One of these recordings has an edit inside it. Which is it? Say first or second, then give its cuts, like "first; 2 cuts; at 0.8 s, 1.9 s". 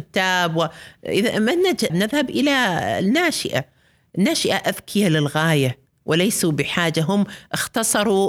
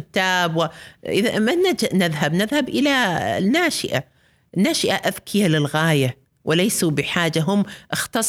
first; 1 cut; at 1.9 s